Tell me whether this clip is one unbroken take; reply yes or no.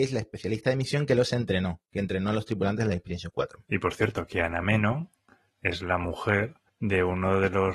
yes